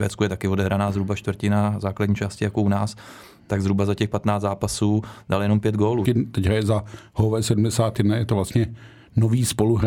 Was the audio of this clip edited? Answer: yes; 1 cut; at 6.1 s

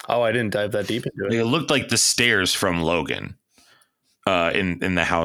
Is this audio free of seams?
yes; 0 cuts

